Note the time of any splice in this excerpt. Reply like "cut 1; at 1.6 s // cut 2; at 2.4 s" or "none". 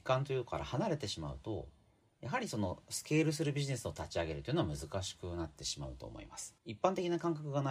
cut 1; at 6.6 s